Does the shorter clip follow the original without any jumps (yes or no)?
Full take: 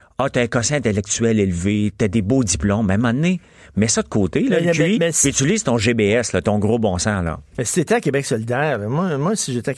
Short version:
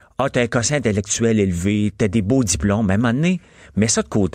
yes